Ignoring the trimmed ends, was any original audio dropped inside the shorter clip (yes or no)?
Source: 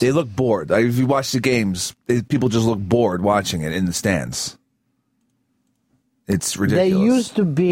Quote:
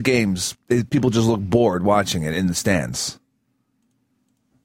no